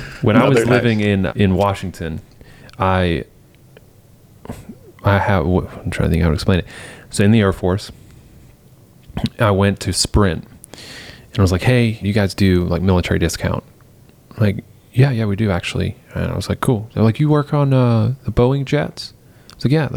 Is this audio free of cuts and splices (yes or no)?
no